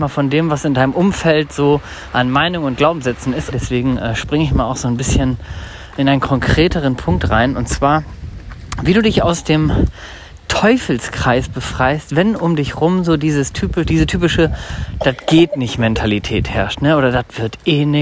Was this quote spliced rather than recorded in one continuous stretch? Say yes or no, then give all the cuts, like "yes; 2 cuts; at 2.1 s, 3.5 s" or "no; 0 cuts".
yes; 1 cut; at 3.5 s